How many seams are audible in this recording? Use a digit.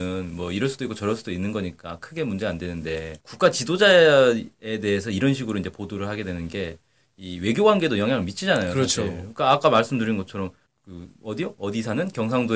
1